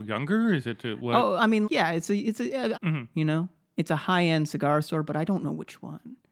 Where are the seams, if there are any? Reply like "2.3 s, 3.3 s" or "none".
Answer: 1.6 s, 2.7 s